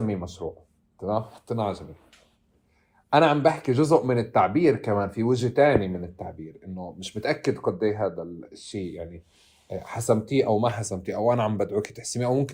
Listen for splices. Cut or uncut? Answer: cut